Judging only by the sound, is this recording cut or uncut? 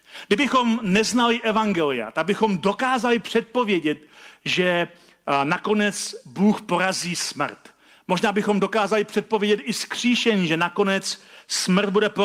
uncut